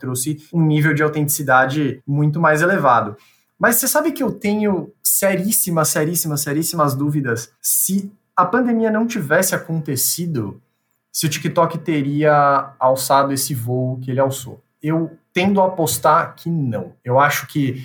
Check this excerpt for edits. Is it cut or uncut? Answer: uncut